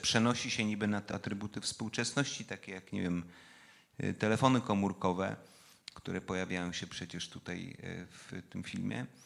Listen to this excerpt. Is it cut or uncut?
cut